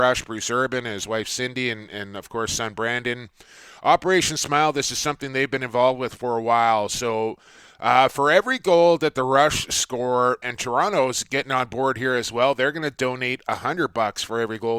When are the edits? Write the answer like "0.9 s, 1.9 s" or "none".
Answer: 10.4 s